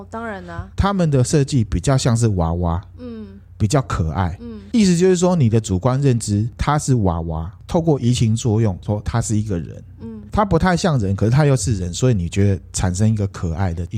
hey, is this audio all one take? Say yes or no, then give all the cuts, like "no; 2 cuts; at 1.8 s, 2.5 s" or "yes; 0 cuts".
yes; 0 cuts